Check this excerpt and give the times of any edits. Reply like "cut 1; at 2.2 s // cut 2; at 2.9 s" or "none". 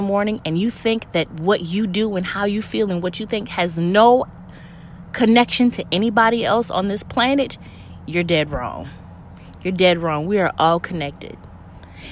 none